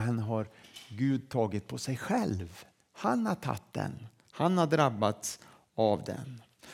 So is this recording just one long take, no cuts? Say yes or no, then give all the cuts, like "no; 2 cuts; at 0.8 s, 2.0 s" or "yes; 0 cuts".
yes; 0 cuts